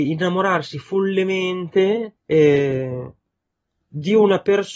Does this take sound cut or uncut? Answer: cut